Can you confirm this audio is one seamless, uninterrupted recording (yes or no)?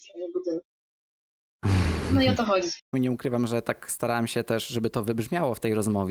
no